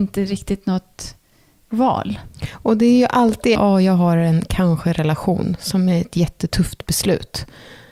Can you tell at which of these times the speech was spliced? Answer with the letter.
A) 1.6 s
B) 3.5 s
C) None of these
B